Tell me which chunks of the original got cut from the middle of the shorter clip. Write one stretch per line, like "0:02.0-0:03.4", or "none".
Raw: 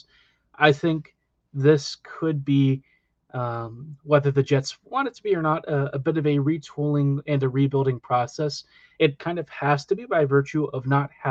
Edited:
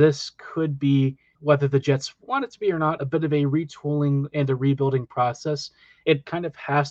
0:03.0-0:04.0
0:05.6-0:05.9

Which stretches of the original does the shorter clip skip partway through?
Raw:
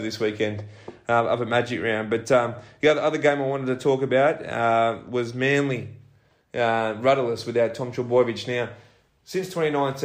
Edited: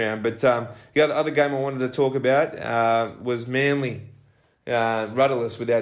none

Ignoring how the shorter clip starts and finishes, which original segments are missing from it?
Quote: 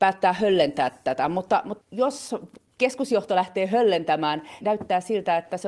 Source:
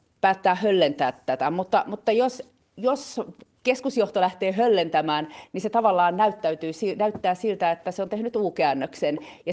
0:02.0-0:02.7
0:05.5-0:06.9

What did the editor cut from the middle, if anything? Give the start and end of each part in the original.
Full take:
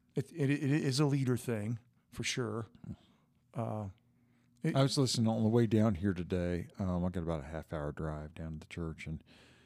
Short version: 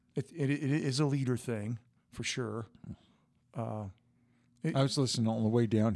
none

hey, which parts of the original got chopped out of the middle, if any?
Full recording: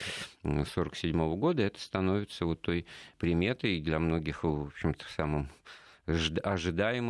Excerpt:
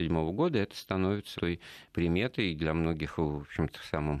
0:02.4-0:02.6

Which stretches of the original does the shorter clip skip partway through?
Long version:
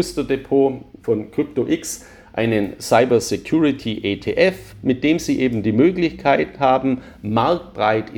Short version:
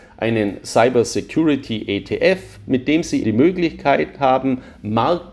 0:05.4-0:05.6

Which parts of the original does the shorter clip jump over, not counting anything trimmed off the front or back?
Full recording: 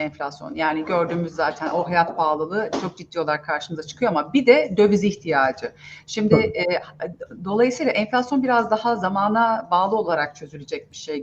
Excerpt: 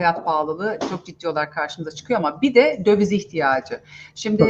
none

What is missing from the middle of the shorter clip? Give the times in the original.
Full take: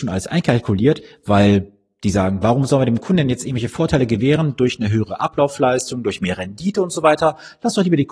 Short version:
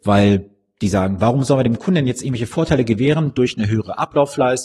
none

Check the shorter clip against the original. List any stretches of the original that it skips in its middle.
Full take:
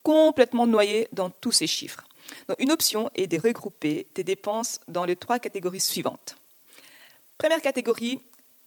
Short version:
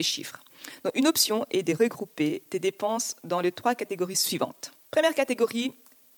0:06.4-0:07.3

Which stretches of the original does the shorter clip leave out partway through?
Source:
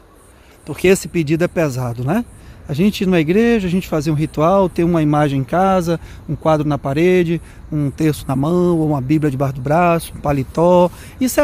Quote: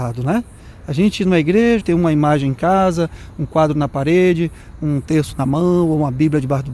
0:03.6-0:04.7

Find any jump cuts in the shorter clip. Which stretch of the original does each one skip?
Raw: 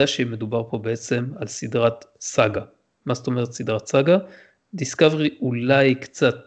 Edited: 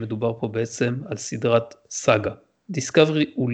0:02.9-0:04.7

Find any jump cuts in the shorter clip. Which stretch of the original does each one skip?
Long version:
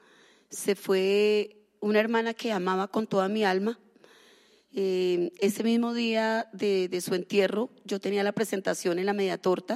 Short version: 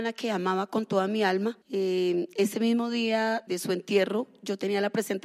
0:03.8-0:04.6
0:06.5-0:06.9

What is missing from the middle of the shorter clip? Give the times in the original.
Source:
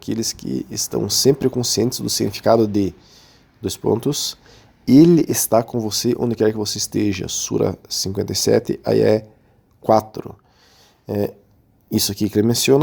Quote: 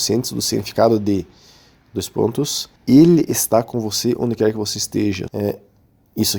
0:04.4-0:04.8
0:07.3-0:11.0

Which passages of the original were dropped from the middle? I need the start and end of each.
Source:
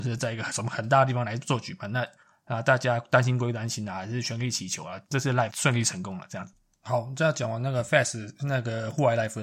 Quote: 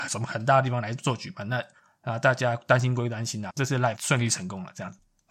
0:03.9-0:05.0

